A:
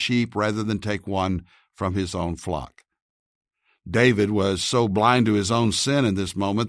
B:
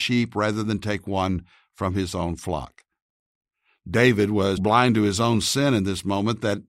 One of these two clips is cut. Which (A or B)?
B